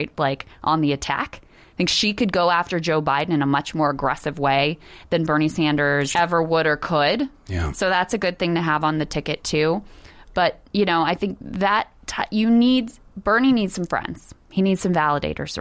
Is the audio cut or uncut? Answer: cut